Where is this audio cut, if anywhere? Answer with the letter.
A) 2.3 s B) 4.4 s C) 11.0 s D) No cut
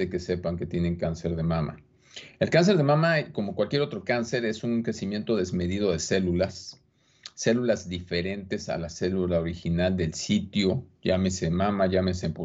D